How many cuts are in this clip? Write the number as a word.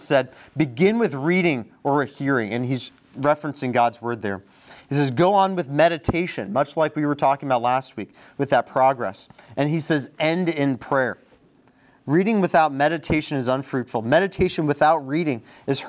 zero